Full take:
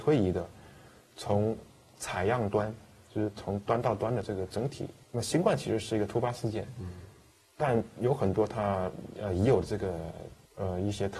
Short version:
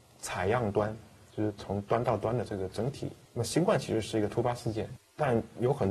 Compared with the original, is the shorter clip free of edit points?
no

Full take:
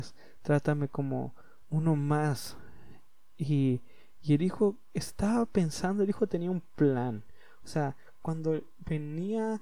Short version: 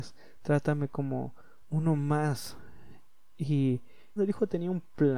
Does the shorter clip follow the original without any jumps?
no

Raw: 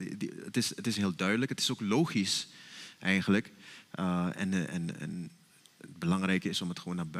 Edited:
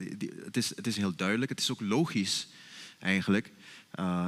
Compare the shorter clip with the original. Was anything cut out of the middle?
no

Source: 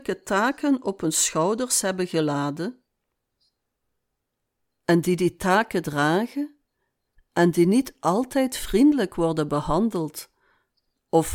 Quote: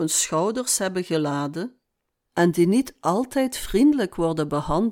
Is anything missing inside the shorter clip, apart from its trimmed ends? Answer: yes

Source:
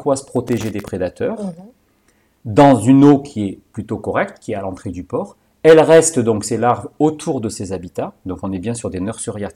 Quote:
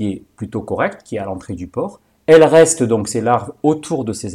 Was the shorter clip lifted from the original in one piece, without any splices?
yes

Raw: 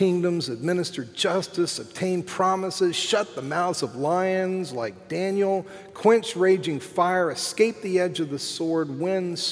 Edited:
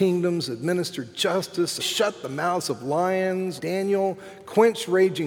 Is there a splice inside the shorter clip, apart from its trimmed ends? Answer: yes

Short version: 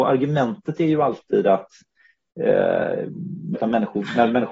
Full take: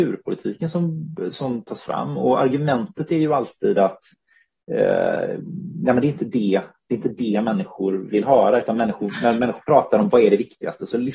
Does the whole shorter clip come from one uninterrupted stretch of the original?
no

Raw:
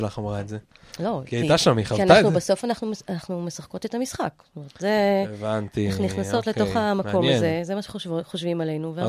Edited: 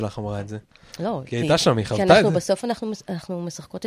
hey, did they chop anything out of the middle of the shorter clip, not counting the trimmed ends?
no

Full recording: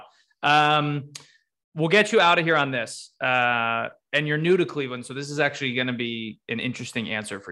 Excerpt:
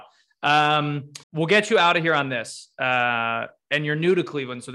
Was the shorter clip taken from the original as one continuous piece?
no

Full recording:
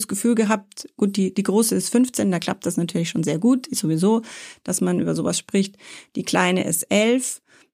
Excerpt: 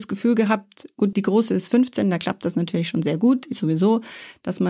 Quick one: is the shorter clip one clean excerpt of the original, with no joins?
no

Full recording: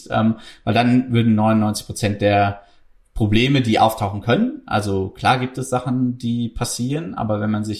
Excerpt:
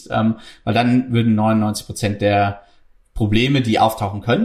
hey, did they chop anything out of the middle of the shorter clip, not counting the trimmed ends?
no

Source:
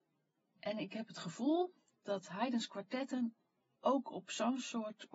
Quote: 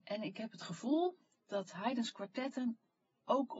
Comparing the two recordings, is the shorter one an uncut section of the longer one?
yes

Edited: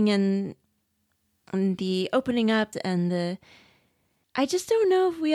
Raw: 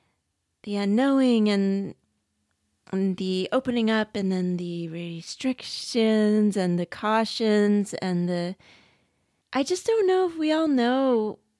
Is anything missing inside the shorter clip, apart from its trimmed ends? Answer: yes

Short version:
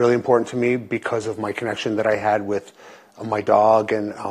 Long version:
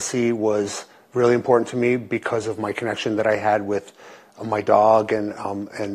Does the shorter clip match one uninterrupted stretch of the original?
yes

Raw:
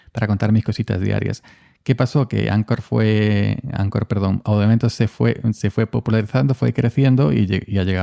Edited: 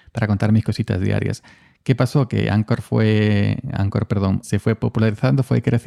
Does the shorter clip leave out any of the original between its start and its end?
yes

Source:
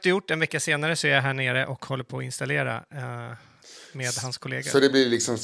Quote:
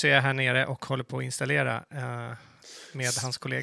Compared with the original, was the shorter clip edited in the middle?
no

